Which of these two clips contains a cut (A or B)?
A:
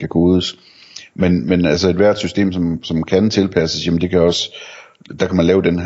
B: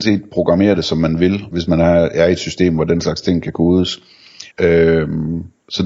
B